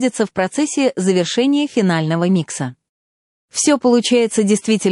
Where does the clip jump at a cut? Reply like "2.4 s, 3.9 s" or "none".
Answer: 3.3 s